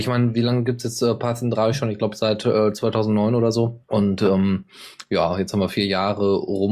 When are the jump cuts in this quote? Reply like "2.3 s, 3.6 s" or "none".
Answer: 3.8 s

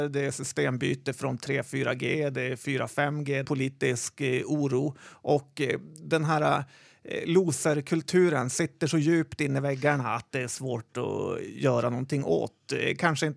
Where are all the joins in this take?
3.4 s

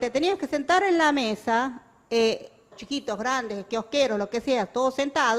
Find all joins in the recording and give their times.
2.7 s

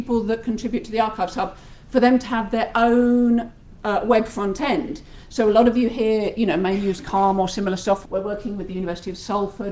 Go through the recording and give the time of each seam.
8.1 s

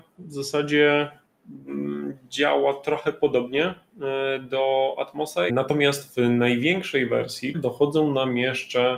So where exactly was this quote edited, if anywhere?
5.5 s, 7.5 s

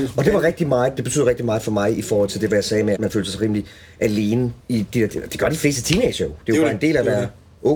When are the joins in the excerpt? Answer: 3.0 s, 4.6 s

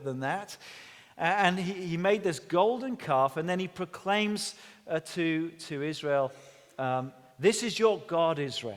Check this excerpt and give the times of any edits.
none

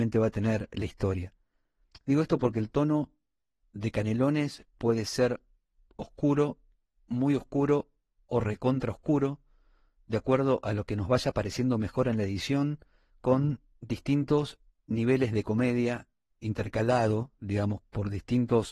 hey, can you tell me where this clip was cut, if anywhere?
none

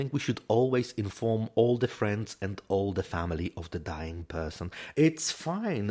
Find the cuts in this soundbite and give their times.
4.9 s

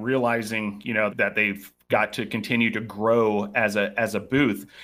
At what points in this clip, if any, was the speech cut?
1.1 s

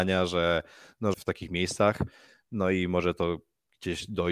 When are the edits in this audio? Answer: 1.1 s

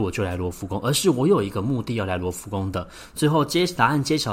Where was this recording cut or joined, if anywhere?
none

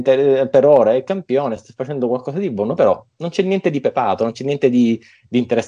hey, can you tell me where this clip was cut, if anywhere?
none

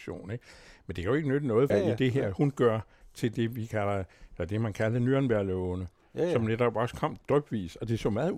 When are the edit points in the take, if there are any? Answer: 1.7 s

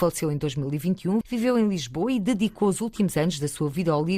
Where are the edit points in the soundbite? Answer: 1.2 s

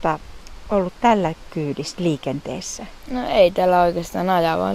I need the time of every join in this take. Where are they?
none

